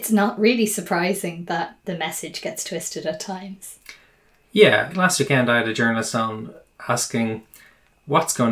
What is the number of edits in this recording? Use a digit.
1